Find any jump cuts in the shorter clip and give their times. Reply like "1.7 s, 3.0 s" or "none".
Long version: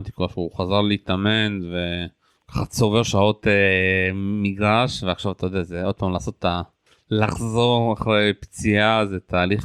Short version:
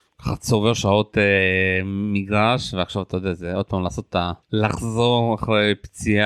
4.4 s